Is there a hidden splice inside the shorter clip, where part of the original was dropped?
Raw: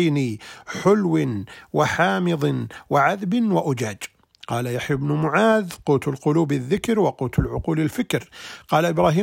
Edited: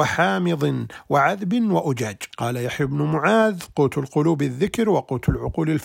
yes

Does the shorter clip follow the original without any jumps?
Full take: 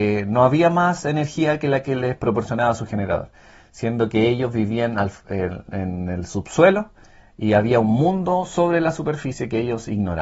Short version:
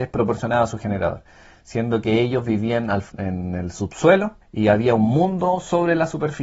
no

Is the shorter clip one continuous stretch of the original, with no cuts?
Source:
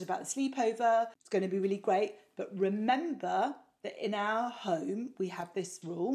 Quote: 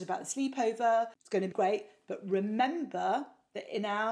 no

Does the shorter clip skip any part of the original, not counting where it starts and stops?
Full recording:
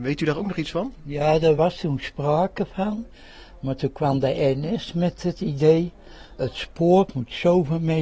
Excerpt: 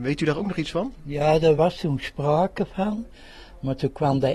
no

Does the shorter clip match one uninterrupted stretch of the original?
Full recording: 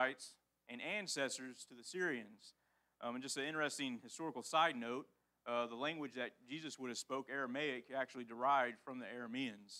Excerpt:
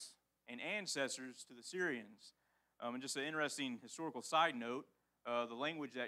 yes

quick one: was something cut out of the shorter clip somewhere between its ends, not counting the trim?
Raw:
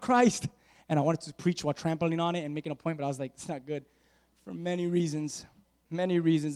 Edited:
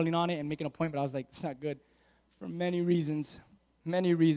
no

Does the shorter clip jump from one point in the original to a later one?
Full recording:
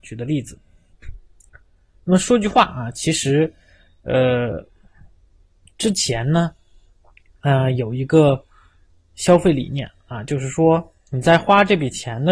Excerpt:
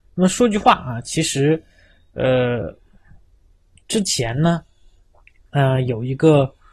no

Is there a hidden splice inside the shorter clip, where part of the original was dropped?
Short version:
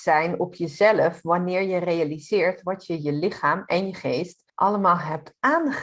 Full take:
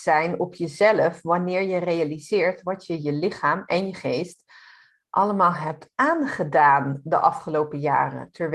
yes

